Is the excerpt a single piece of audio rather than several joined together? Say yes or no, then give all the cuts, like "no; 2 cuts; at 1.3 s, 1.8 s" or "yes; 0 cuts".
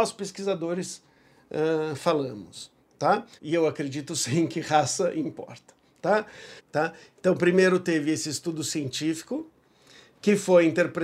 no; 2 cuts; at 3.4 s, 6.6 s